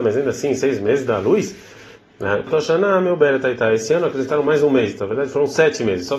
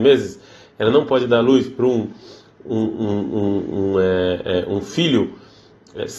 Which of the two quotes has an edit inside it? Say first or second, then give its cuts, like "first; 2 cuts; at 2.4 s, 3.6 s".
first; 1 cut; at 2.5 s